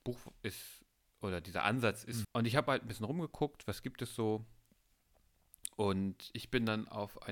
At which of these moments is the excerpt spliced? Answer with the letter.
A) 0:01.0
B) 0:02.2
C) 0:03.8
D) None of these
B